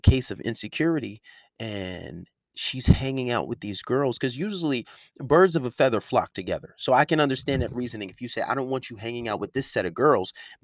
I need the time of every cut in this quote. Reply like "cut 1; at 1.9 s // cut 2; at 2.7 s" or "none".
none